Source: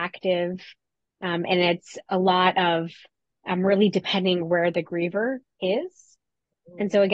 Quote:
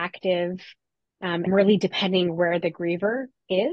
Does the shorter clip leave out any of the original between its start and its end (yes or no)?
yes